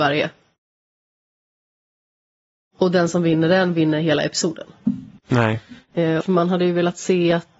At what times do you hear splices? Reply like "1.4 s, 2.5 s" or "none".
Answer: 5.2 s, 6.2 s